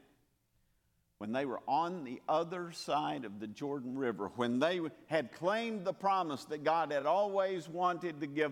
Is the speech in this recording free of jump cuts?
yes; 0 cuts

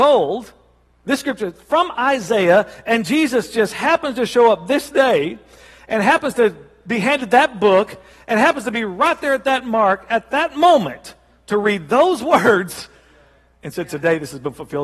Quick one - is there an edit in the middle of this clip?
no; 0 cuts

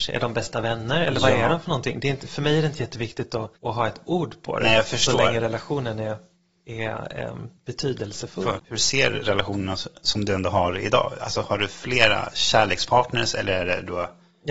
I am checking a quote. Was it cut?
yes; 1 cut; at 8.6 s

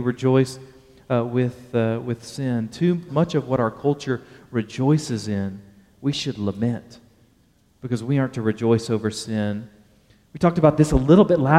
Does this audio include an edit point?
yes; 1 cut; at 3.1 s

